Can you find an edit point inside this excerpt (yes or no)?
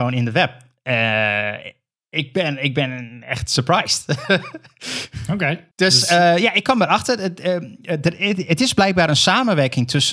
yes